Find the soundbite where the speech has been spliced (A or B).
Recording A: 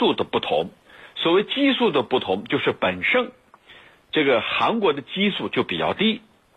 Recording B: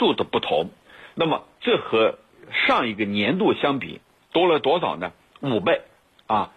B